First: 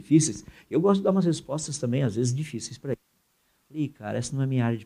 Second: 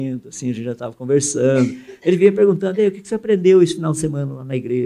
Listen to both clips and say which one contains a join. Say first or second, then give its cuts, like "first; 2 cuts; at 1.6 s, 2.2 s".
first; 1 cut; at 3.6 s